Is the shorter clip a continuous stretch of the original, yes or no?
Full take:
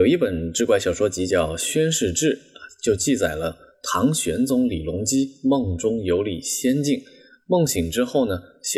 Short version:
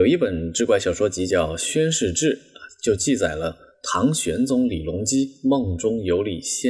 yes